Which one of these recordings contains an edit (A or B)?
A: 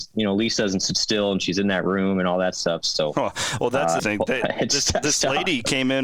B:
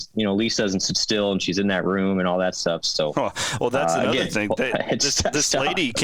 A